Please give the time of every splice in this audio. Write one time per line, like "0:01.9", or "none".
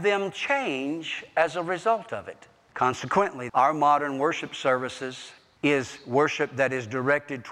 0:03.5

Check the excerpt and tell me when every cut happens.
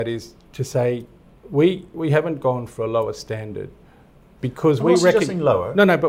none

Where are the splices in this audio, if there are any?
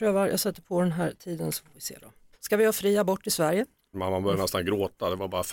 0:02.3
0:03.9

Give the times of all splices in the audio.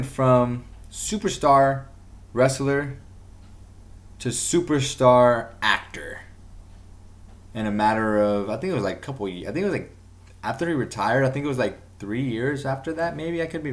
none

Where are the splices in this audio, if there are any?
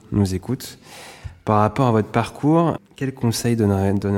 0:02.8

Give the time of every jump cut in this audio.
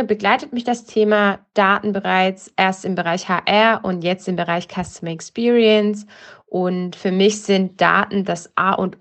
none

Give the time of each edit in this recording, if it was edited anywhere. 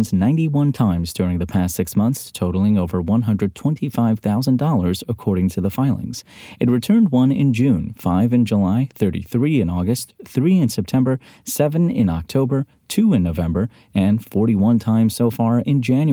none

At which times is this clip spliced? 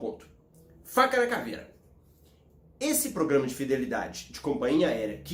none

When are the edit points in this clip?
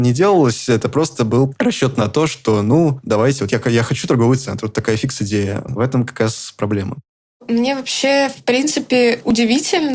0:05.7

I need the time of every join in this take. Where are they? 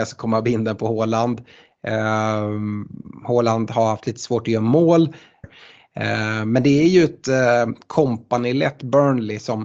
0:05.4

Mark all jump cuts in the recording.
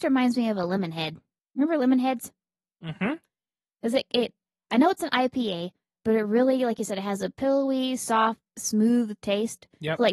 none

